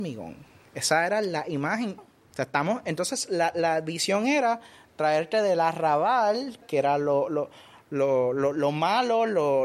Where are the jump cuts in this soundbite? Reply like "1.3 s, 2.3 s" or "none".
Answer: 2.0 s, 6.6 s